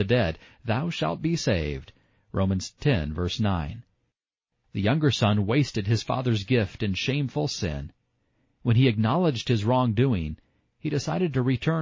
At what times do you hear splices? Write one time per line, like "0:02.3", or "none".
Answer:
0:04.6